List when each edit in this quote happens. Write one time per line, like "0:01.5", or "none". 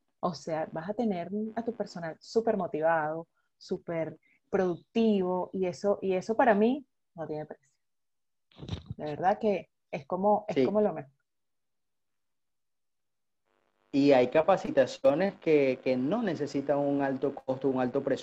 none